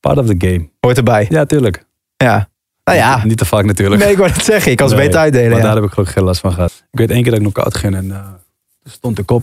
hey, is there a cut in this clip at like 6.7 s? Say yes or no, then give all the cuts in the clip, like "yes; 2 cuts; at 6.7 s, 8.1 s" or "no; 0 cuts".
yes; 1 cut; at 6.7 s